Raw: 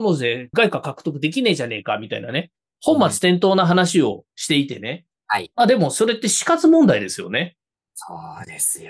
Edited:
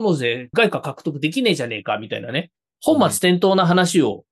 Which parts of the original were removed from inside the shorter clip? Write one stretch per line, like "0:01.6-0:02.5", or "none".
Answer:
none